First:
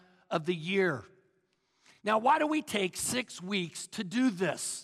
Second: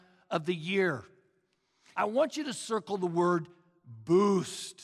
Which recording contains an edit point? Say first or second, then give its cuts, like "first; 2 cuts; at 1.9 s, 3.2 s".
second; 1 cut; at 1.9 s